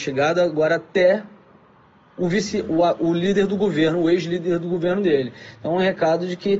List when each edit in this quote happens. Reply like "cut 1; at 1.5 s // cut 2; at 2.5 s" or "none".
none